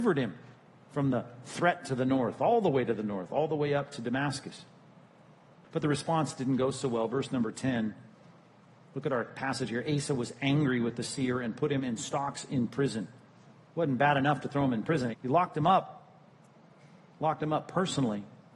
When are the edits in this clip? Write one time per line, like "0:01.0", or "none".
0:15.1